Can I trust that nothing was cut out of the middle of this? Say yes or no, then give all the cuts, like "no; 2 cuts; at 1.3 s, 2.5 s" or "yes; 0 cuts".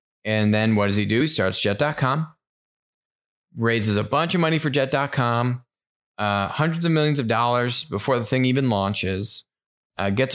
yes; 0 cuts